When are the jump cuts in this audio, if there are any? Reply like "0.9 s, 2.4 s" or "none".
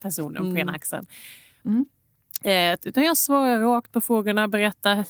1.6 s, 2.8 s